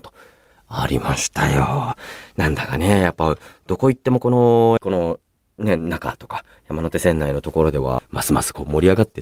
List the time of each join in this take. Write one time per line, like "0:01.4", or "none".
0:04.8
0:08.0